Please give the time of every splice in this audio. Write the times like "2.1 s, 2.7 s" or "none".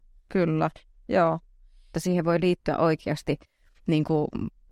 1.9 s